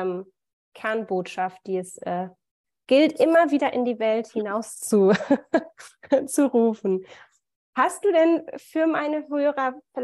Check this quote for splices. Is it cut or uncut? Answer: uncut